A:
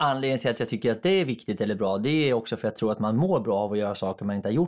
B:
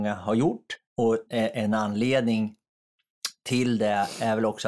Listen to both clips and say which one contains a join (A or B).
B